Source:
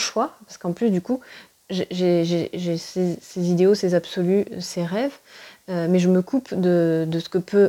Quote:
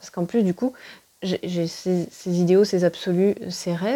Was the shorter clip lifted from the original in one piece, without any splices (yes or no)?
no